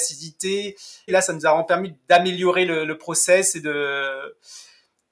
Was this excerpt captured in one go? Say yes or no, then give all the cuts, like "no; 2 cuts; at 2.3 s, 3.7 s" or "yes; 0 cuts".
no; 1 cut; at 1.1 s